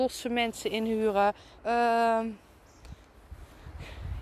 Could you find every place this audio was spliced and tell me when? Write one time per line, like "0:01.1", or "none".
0:01.6